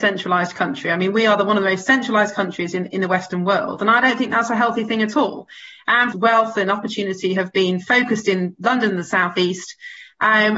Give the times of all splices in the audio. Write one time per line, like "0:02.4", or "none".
0:06.1